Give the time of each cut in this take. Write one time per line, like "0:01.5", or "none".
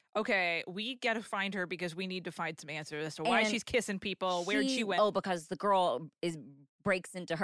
0:05.0